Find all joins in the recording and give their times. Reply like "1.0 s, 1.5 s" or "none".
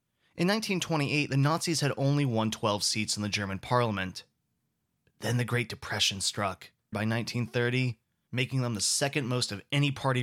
6.9 s, 8.3 s